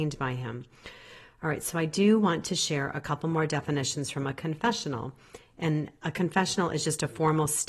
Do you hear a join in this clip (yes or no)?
no